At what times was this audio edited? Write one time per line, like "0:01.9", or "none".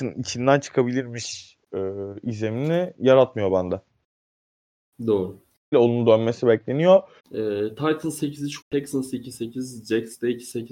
0:05.7
0:07.2
0:08.6